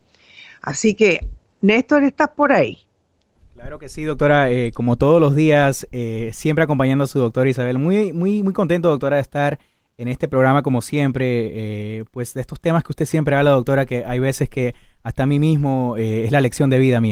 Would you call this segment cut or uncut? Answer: uncut